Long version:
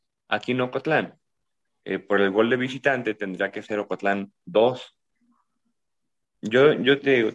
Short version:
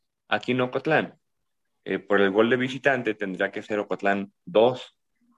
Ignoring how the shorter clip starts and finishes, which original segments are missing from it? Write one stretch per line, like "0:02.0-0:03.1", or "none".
none